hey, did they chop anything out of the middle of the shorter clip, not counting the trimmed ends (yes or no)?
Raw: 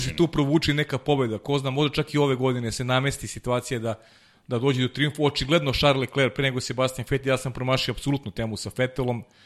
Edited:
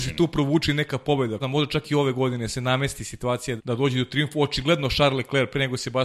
yes